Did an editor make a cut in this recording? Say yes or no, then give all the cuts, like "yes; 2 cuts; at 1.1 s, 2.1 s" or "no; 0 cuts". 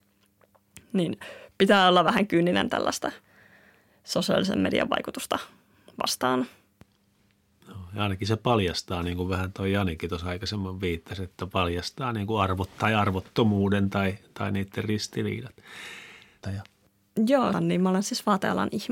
yes; 2 cuts; at 16.4 s, 17.5 s